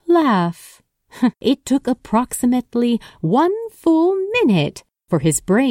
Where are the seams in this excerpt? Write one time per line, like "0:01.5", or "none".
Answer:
0:01.3